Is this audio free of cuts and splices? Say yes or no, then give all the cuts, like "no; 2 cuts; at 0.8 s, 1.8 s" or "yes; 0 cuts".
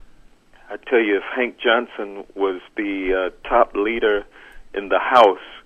yes; 0 cuts